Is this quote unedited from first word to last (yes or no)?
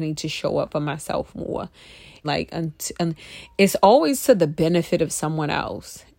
no